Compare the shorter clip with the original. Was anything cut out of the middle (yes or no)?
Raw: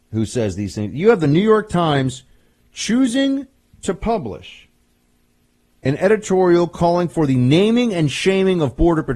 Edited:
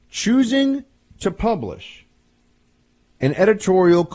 no